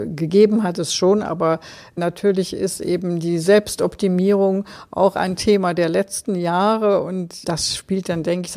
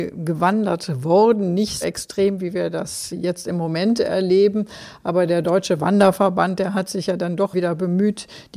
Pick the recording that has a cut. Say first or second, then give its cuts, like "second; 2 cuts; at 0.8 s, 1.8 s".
second; 1 cut; at 1.8 s